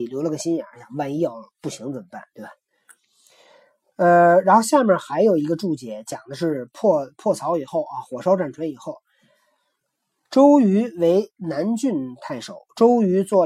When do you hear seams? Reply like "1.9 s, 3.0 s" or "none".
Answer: none